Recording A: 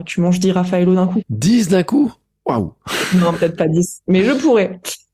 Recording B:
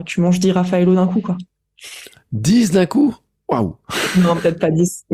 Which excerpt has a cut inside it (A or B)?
A